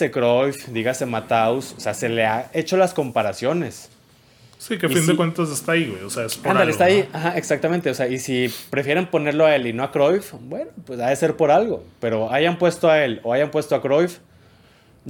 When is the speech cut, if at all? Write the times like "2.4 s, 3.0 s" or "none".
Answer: none